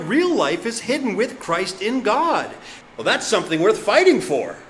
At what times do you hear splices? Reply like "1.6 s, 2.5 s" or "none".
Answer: 2.8 s